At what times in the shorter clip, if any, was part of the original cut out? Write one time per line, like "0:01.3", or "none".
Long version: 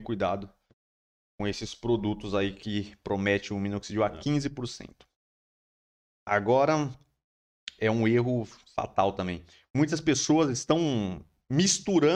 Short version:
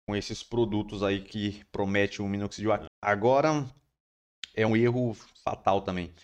0:02.9
0:04.7